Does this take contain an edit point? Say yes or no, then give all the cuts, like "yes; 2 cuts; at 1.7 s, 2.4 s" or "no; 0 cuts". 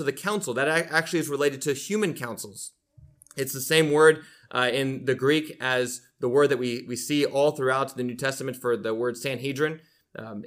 no; 0 cuts